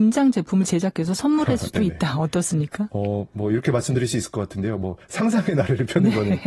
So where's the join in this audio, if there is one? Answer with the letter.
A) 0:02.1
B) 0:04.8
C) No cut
C